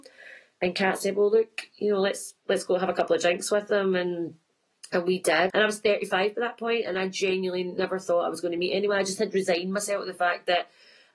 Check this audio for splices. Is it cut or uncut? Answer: cut